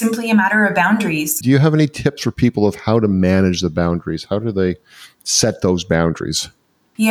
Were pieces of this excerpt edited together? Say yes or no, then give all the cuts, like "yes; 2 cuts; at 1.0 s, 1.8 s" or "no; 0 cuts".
yes; 1 cut; at 1.4 s